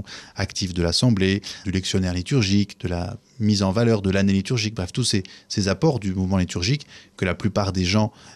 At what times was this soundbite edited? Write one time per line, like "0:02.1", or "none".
0:01.6